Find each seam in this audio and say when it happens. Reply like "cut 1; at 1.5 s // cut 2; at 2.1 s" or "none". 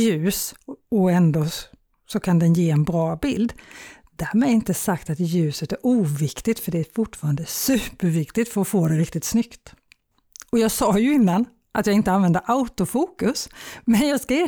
none